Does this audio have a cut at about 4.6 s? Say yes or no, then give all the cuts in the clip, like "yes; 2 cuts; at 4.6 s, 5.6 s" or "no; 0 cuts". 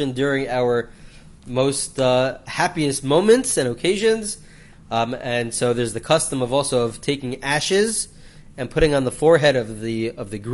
no; 0 cuts